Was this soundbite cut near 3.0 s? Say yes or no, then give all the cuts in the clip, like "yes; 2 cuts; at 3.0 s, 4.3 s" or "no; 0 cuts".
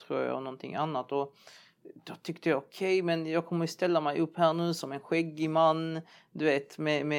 no; 0 cuts